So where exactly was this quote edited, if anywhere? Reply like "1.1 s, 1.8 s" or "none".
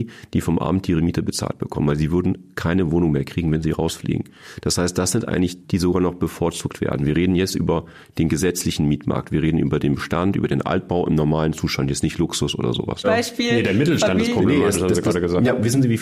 5.6 s, 13.0 s